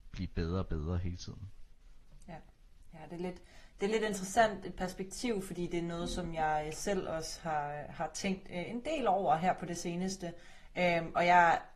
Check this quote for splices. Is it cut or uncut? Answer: uncut